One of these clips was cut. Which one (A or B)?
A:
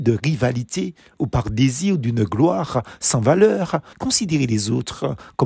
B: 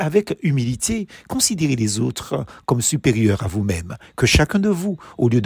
A